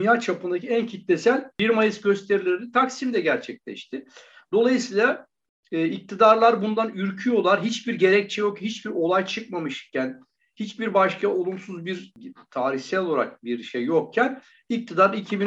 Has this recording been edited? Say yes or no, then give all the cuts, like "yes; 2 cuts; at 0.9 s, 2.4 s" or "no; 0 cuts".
no; 0 cuts